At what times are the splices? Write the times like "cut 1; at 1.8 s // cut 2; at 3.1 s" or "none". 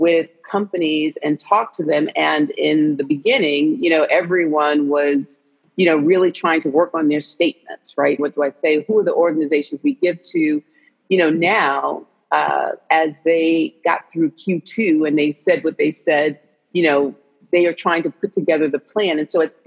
cut 1; at 8.2 s